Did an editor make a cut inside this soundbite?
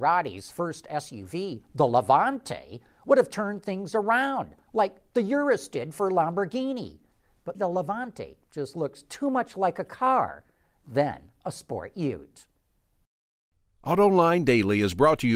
yes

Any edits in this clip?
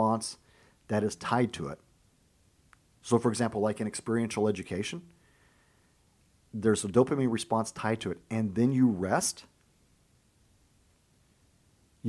no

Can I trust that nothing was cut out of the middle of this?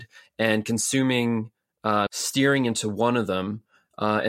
no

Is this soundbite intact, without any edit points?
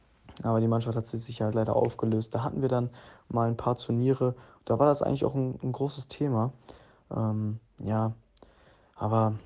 no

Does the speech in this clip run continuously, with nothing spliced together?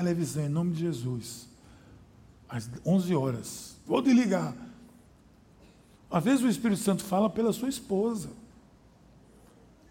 no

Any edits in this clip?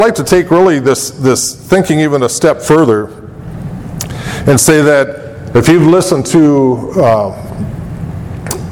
yes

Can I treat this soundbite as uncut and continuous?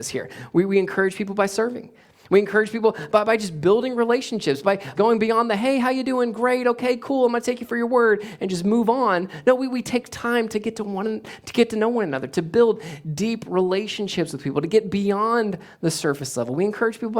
no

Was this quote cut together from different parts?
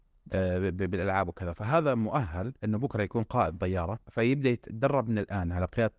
yes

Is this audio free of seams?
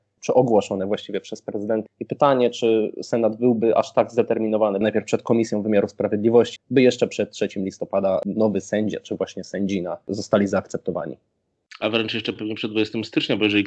no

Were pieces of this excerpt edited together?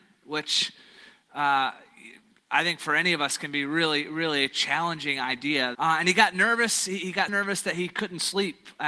yes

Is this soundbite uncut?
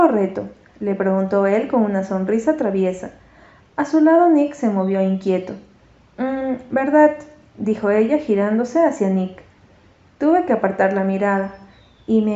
yes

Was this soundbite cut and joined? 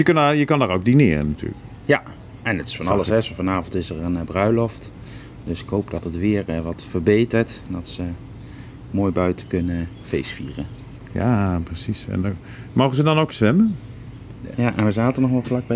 yes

